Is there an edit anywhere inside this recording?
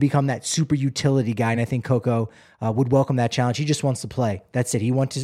no; 0 cuts

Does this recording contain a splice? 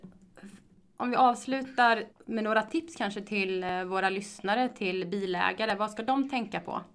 yes; 1 cut; at 2.1 s

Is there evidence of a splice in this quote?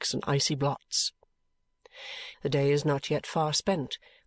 yes; 1 cut; at 2.3 s

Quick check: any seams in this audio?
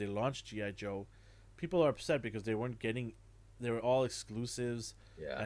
no; 0 cuts

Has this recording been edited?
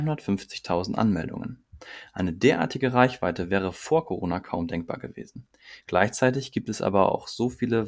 yes; 1 cut; at 5.8 s

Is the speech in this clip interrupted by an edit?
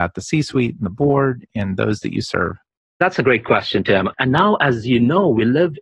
yes; 1 cut; at 4.1 s

